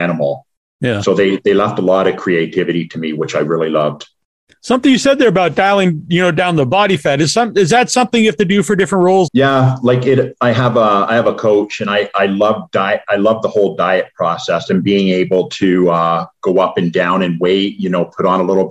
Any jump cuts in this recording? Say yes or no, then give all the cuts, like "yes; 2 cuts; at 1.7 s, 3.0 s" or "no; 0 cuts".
yes; 1 cut; at 9.3 s